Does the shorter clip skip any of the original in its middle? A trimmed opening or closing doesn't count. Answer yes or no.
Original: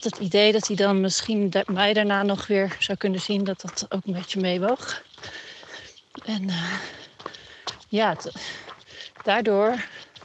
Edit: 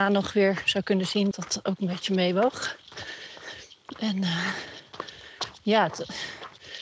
yes